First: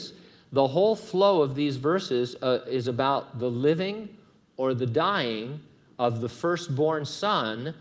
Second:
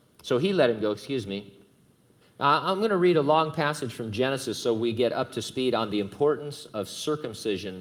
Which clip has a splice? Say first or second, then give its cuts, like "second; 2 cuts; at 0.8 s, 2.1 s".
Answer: second; 1 cut; at 2.2 s